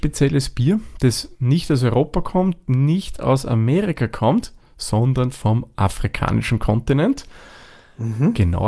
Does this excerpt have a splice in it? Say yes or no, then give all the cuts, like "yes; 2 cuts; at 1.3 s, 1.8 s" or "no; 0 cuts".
no; 0 cuts